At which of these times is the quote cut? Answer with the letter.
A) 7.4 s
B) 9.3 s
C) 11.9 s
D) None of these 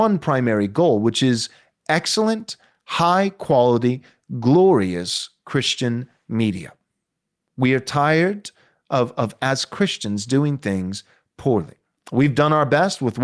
D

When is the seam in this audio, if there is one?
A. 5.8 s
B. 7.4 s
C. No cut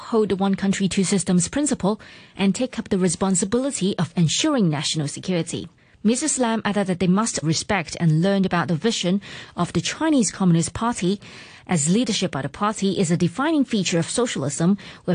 B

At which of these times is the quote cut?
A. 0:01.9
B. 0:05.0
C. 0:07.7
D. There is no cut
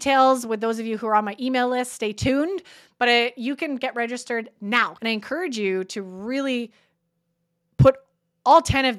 B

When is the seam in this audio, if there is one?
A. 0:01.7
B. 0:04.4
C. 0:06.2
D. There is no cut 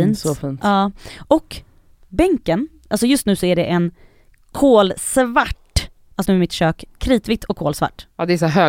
C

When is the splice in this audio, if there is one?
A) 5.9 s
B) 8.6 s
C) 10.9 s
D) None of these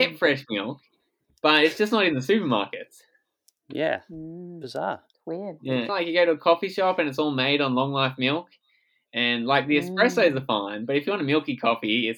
A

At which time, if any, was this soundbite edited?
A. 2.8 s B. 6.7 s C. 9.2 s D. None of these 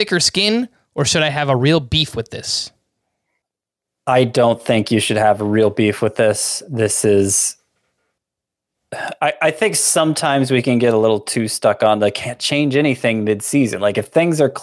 D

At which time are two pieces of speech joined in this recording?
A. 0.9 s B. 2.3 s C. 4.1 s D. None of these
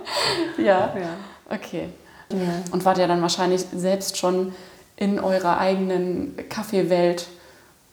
B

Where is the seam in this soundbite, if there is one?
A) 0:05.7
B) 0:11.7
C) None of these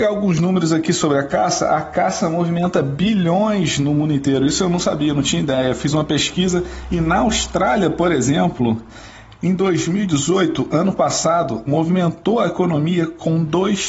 B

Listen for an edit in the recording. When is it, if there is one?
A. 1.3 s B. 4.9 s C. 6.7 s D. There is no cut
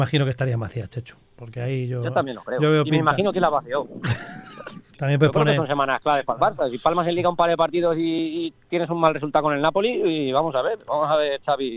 B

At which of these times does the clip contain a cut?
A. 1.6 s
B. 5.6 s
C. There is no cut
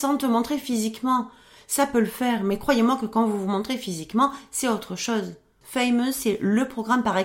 B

